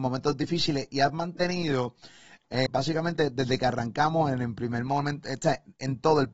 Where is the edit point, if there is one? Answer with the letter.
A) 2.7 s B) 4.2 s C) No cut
A